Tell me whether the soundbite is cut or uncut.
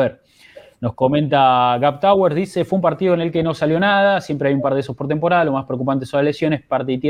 uncut